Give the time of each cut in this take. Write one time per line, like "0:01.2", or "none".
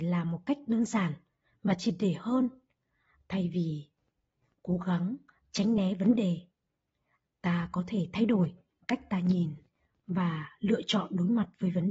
none